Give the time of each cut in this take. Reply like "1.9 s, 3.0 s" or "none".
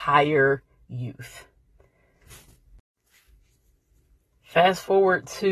none

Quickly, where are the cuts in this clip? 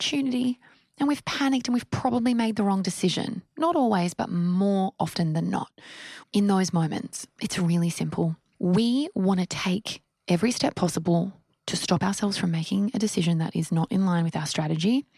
6.2 s

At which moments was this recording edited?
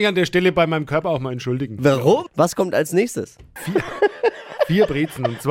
2.3 s, 3.6 s

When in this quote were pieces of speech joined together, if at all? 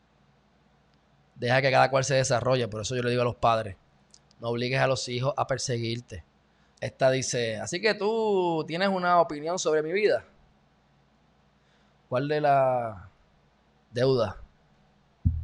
6.8 s

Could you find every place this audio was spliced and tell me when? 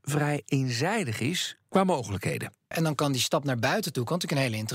2.7 s

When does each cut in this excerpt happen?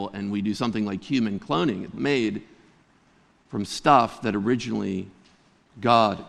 1.9 s

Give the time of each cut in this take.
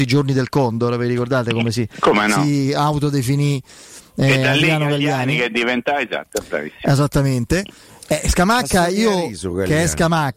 none

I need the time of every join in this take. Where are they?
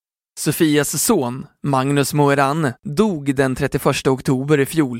2.8 s

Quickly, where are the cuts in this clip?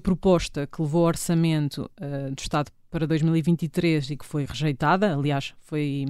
none

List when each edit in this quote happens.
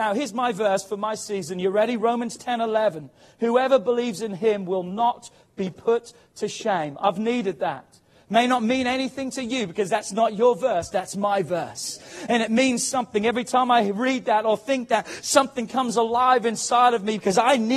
none

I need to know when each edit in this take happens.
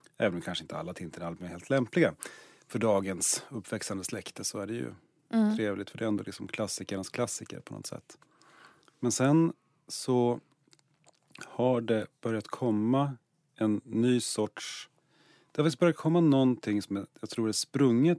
none

